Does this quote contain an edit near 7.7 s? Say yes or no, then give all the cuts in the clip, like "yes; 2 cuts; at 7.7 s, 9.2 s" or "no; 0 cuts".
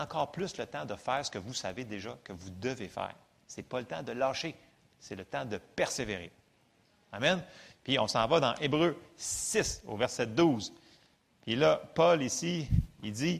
no; 0 cuts